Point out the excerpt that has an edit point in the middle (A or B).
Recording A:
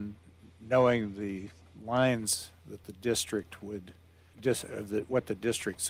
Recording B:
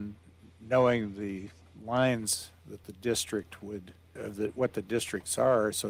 B